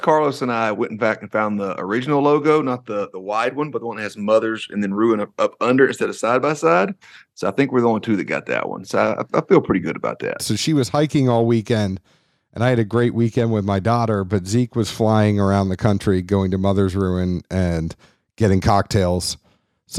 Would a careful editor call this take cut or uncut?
cut